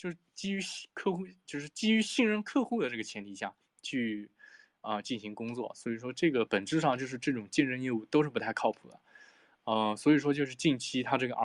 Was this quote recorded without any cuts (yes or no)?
no